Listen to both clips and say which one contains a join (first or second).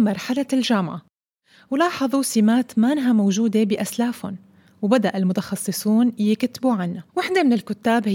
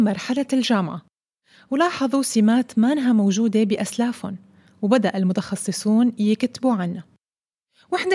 first